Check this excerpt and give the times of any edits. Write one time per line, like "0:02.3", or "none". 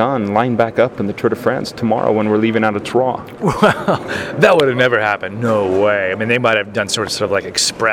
none